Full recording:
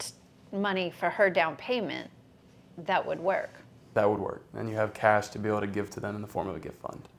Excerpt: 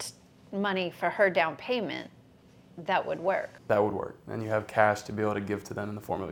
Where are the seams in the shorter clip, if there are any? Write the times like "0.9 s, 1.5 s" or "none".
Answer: 3.6 s